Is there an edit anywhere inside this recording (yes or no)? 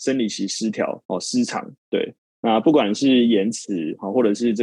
no